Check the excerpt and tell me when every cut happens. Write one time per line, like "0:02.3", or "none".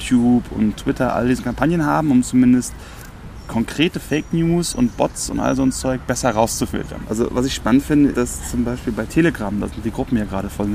0:07.0
0:08.1

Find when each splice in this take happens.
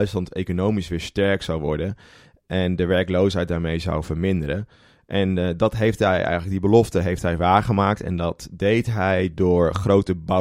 none

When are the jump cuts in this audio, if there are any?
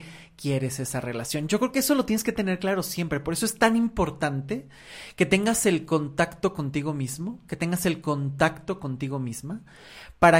none

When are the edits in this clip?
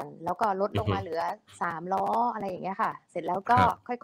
none

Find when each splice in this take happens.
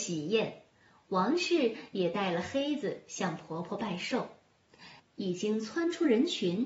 0:05.0

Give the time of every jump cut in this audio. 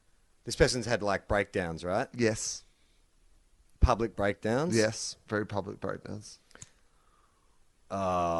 none

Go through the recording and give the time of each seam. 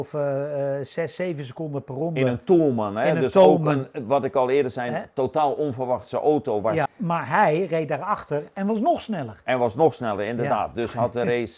0:06.9

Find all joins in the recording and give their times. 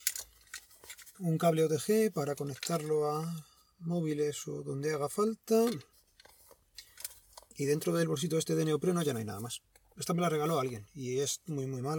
0:01.1
0:09.9

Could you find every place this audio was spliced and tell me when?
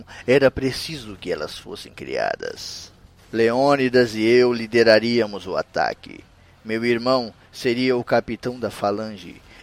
none

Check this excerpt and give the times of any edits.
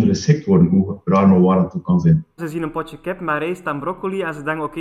0:02.4

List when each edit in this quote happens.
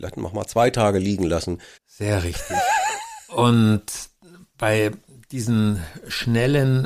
0:01.8

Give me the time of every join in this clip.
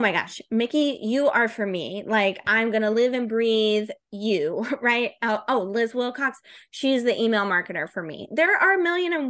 none

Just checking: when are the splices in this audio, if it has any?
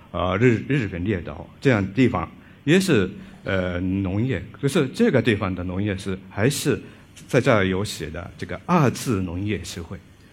none

